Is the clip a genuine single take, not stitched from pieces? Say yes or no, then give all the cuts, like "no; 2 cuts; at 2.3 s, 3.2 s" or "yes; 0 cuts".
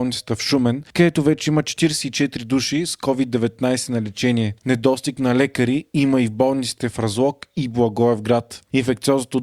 no; 1 cut; at 4.6 s